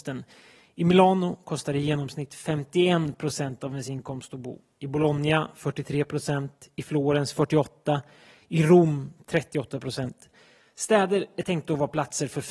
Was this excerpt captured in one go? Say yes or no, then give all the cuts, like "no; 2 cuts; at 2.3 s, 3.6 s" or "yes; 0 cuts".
yes; 0 cuts